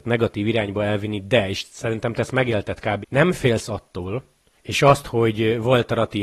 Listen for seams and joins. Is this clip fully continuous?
no; 2 cuts; at 3.0 s, 4.5 s

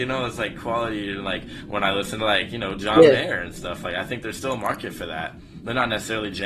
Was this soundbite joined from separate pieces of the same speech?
no; 0 cuts

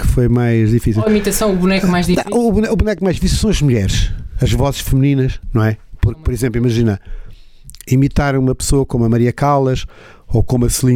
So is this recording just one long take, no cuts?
yes; 0 cuts

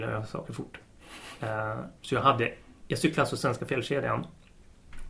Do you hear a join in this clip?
yes; 1 cut; at 2.0 s

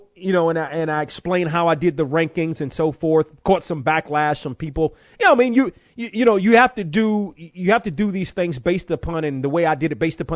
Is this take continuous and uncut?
yes; 0 cuts

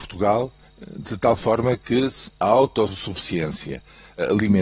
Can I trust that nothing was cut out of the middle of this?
no; 1 cut; at 2.3 s

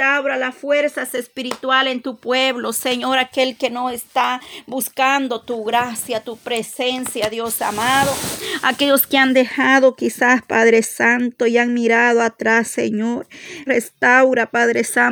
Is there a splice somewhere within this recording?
yes; 1 cut; at 13.7 s

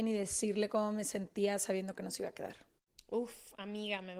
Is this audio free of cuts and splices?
yes; 0 cuts

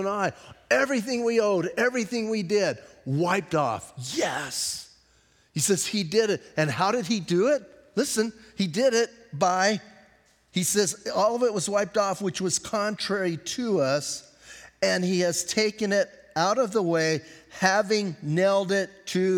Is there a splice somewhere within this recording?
no; 0 cuts

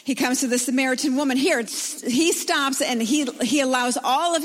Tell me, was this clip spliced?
yes; 1 cut; at 1.6 s

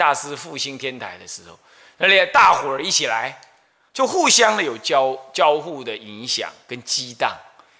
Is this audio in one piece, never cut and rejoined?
yes; 0 cuts

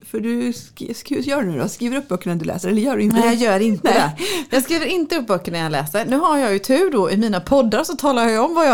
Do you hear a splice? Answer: no; 0 cuts

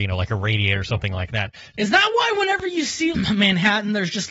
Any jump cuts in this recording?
yes; 2 cuts; at 1.7 s, 3.1 s

